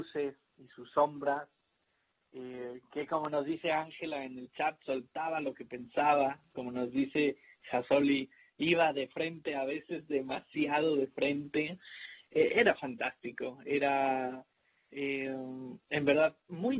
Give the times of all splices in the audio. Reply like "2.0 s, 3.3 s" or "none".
none